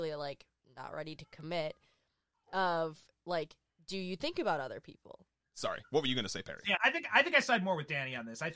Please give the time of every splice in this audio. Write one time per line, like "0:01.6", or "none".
0:05.4
0:06.8

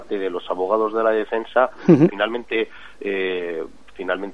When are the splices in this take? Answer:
0:02.1

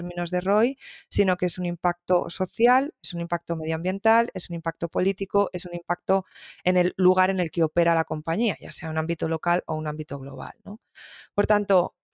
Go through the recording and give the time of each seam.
none

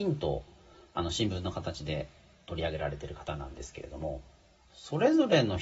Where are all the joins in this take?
0:04.6

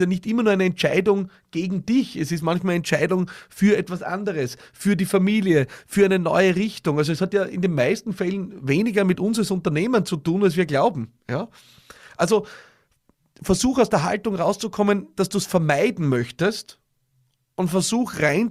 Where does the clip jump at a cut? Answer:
none

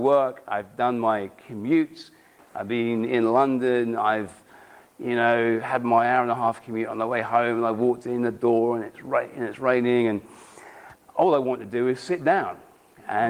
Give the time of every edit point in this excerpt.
none

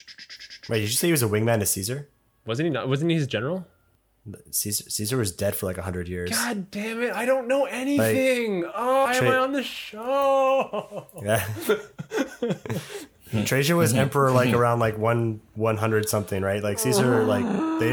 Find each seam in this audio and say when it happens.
0:09.0

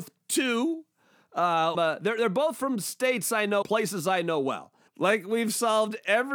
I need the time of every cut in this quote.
0:01.7
0:03.6
0:04.9

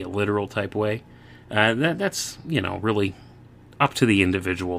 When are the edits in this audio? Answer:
0:03.8

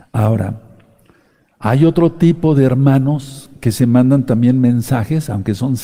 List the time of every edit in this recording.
none

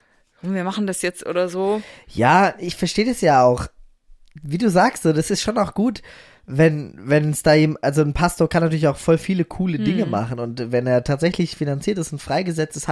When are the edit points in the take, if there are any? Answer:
none

